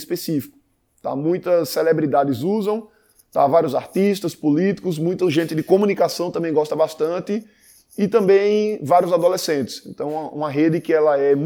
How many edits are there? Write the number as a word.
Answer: zero